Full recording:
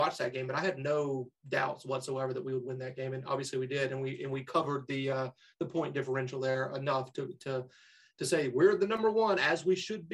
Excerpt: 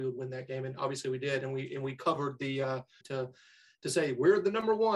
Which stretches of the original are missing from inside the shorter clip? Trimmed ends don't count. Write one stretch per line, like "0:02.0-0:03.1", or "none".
0:05.5-0:07.4